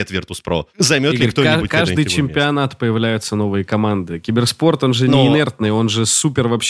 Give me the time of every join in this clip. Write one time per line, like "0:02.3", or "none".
none